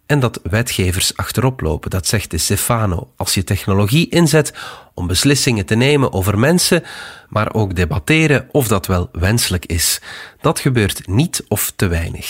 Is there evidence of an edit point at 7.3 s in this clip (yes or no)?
yes